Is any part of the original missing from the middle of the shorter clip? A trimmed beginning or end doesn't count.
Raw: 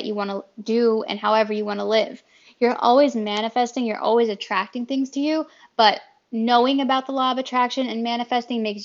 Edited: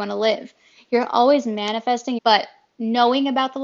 yes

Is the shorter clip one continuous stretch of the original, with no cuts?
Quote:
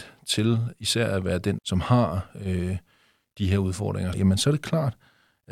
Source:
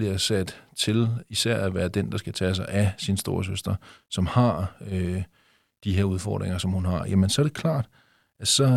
no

